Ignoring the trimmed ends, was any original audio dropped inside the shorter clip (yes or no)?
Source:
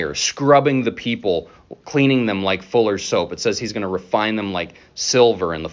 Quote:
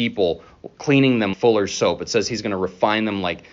yes